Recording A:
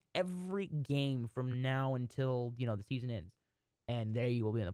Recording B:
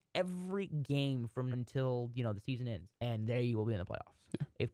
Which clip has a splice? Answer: B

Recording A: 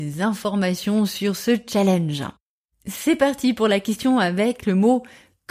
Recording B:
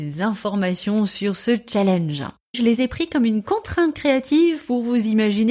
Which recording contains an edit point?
B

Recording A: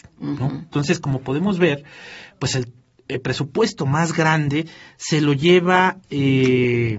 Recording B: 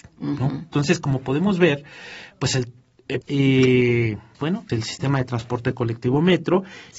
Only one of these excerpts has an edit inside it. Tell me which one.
B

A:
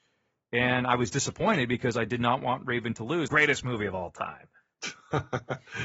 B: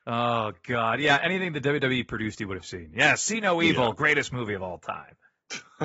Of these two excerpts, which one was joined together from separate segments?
A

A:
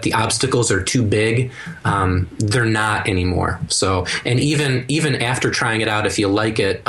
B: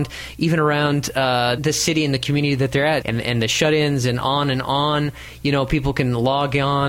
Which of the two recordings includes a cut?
B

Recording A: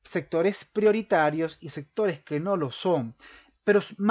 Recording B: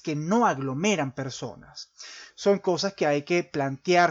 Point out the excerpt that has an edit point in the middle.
B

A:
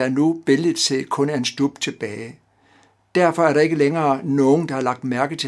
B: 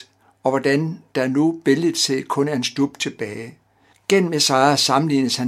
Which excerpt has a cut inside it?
B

